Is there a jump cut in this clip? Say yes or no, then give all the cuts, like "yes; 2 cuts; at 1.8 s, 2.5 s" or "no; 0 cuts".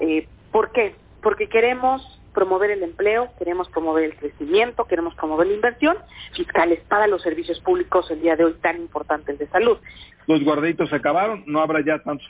yes; 2 cuts; at 6.3 s, 10.1 s